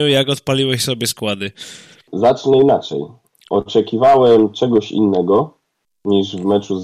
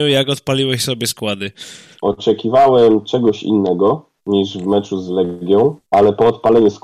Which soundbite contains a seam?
second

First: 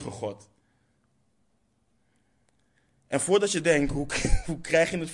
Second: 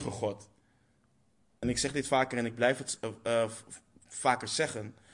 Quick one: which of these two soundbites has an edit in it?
second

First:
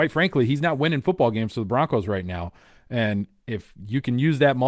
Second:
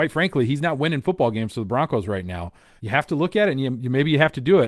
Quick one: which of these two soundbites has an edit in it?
second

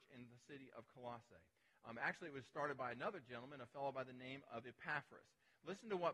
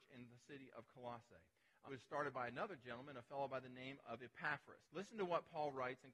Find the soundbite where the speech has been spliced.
second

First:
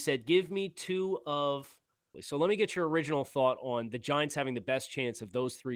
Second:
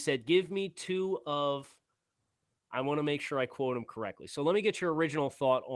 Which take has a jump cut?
first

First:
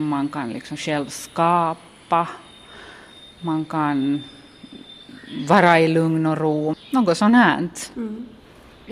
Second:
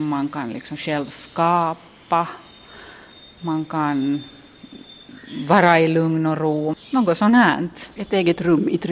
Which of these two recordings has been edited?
second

